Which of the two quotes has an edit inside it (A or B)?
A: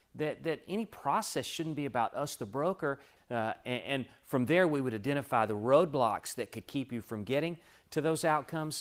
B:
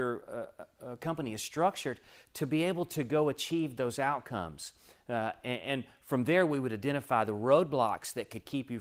A